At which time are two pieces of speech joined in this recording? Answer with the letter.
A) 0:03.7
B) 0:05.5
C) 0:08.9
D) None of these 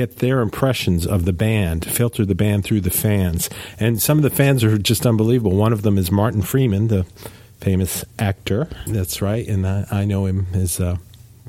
C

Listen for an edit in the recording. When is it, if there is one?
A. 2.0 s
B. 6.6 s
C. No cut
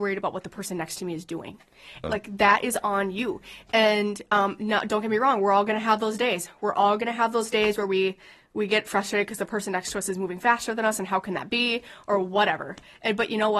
A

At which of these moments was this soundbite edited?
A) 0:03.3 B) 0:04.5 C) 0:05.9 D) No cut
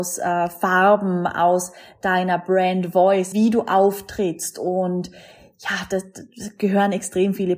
A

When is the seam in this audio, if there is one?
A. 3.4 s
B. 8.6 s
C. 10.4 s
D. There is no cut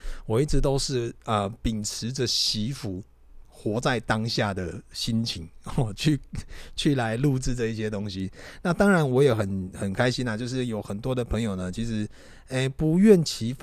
A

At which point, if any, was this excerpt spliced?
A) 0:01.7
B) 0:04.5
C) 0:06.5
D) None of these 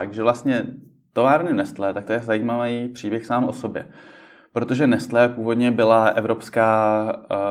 D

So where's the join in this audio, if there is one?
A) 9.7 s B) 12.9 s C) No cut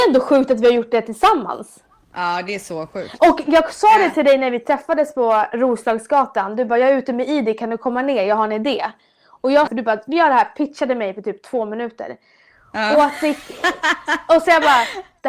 A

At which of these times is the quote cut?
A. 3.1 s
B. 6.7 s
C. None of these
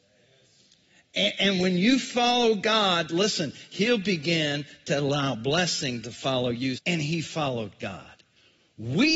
B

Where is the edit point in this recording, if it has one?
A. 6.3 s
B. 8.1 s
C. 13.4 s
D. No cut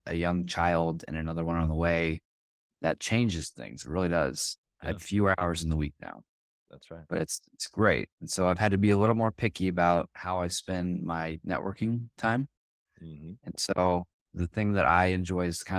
B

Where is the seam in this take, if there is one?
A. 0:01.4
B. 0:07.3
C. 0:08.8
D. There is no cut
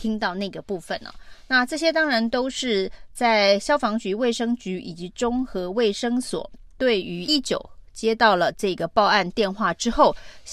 B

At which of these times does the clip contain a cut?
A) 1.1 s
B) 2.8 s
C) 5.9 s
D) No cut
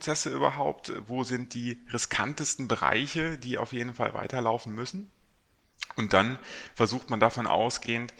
D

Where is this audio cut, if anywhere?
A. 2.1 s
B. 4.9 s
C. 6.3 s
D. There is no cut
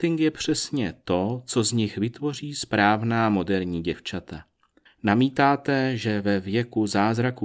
B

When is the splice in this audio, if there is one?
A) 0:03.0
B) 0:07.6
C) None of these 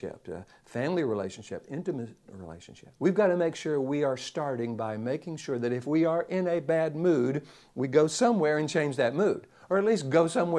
A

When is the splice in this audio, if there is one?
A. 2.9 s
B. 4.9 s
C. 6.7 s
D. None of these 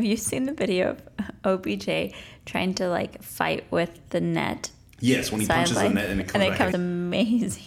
C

